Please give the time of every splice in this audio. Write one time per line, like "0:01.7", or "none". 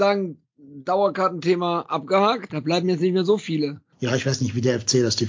0:02.5
0:03.9